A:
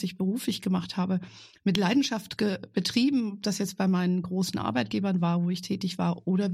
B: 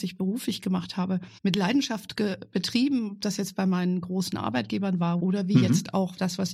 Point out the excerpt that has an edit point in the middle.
B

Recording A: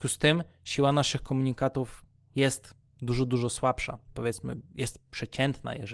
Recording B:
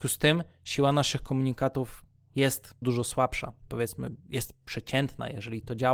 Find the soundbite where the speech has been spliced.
B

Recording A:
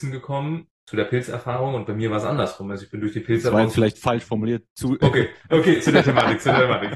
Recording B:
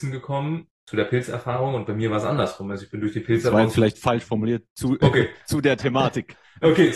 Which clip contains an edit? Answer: A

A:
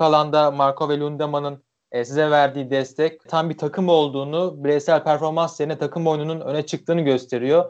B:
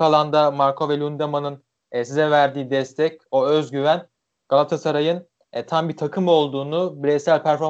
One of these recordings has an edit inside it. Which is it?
A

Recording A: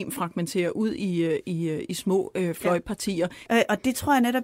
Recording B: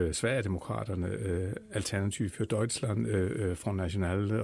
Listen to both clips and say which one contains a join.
A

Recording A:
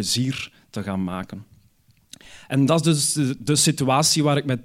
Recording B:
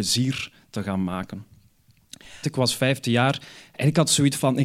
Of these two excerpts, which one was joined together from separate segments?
B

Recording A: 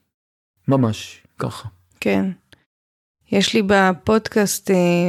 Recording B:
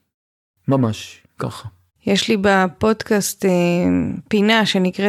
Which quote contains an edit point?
B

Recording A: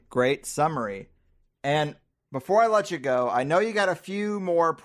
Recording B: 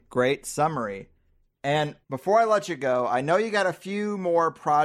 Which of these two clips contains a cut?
B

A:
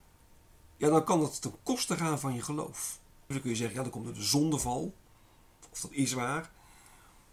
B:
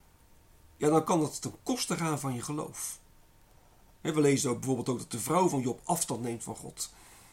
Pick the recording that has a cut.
A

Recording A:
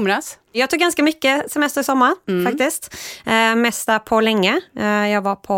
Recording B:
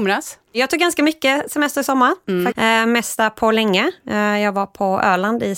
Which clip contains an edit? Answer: B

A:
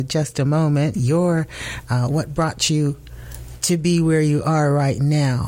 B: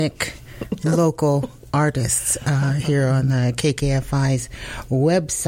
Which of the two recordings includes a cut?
A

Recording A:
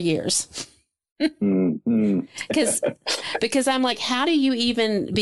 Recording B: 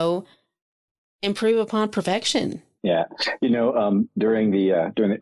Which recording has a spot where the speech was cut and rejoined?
B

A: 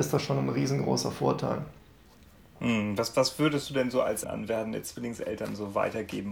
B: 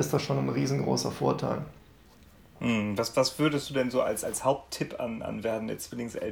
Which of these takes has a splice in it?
A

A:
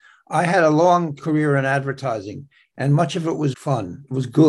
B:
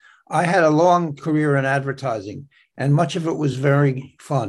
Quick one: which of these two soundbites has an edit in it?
A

